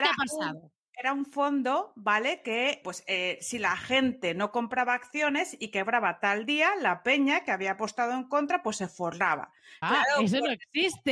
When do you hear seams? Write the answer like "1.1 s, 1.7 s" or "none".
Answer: 2.8 s, 9.8 s